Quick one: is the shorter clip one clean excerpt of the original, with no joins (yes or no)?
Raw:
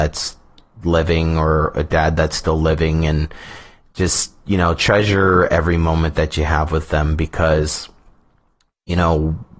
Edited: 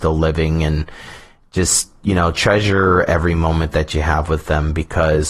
yes